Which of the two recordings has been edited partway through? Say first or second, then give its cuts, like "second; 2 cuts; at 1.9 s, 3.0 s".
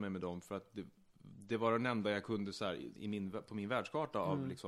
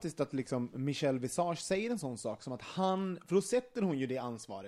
first; 1 cut; at 2.9 s